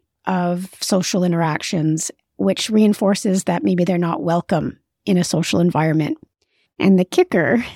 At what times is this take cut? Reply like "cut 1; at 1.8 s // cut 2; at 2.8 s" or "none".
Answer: cut 1; at 6.7 s